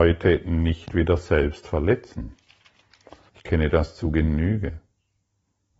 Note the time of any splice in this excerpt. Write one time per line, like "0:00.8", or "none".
0:03.3

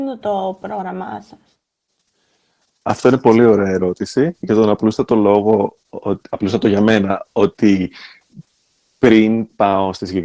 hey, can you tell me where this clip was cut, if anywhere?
none

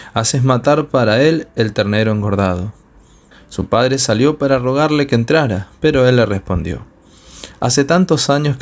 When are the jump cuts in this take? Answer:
0:03.3

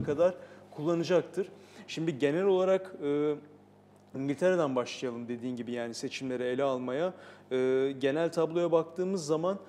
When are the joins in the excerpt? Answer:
none

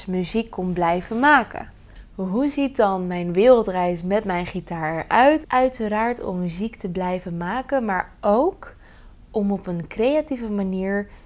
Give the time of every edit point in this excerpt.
0:05.4

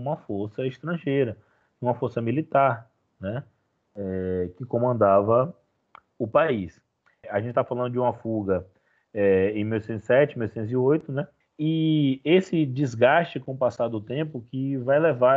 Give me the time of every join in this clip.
0:07.2
0:11.4

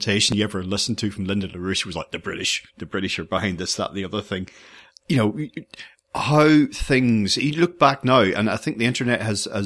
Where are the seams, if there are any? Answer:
none

